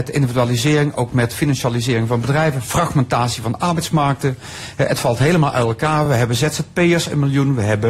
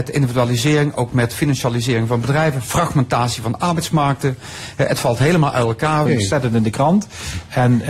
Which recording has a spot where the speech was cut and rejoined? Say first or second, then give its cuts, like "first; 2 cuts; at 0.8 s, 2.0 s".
second; 1 cut; at 6.1 s